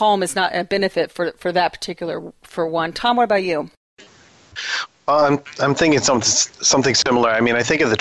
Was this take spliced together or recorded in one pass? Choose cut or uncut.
uncut